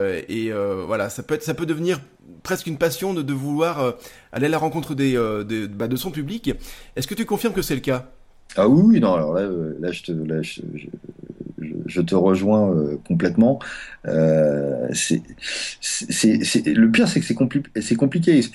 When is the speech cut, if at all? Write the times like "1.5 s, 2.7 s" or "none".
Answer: none